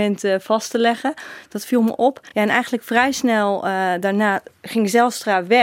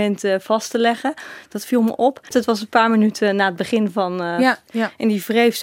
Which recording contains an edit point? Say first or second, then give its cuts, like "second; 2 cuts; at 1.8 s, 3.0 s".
second; 2 cuts; at 2.3 s, 4.7 s